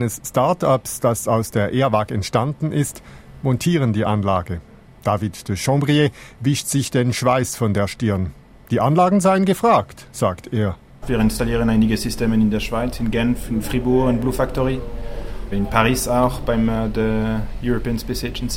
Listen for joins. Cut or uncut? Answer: uncut